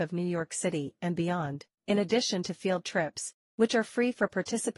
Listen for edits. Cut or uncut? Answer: cut